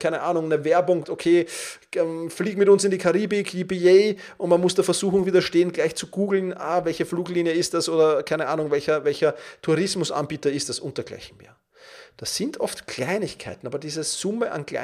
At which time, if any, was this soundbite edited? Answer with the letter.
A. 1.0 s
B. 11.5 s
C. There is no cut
A